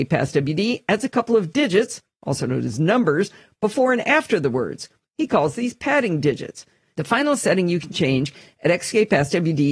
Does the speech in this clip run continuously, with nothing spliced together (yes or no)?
no